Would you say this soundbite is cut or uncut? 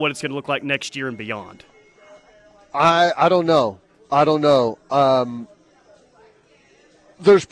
uncut